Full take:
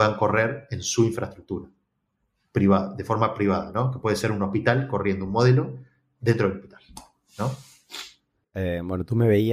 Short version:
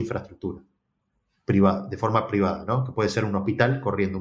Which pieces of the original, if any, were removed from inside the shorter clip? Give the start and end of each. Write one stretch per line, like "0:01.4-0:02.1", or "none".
none